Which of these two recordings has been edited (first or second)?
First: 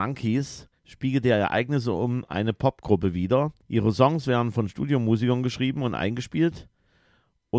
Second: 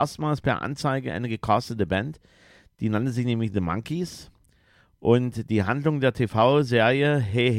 first